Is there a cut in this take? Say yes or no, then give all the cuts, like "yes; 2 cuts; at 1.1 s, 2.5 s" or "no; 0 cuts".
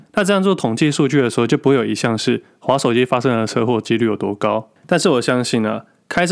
no; 0 cuts